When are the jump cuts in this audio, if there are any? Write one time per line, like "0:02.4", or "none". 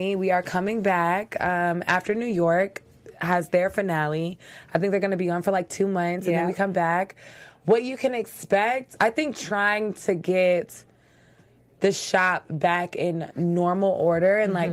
0:09.0